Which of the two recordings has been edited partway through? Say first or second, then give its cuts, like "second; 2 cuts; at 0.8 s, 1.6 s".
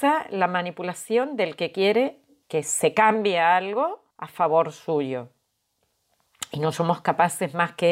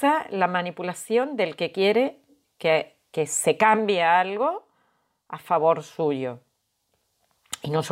first; 2 cuts; at 2.4 s, 4.1 s